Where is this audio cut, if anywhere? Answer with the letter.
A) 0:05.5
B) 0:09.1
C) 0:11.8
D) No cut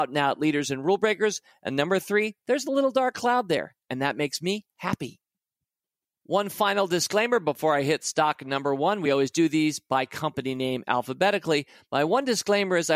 D